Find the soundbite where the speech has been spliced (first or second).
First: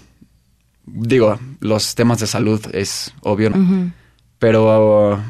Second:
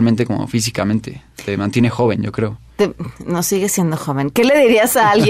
first